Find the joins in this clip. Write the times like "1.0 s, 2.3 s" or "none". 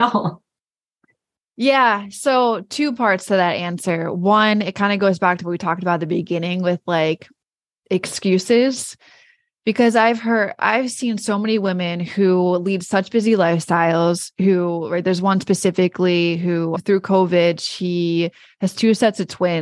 none